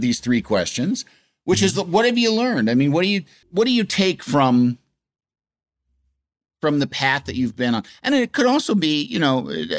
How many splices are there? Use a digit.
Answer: 1